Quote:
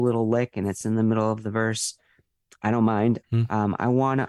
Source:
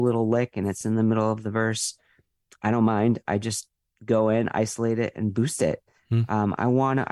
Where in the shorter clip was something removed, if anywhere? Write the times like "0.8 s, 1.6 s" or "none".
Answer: 3.2 s